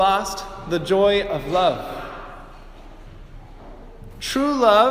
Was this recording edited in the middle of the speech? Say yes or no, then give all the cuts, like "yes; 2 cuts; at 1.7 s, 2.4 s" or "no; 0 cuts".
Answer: no; 0 cuts